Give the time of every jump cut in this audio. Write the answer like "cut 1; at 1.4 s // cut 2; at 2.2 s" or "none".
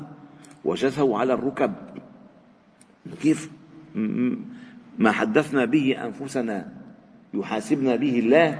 none